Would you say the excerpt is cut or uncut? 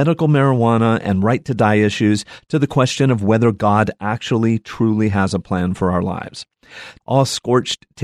cut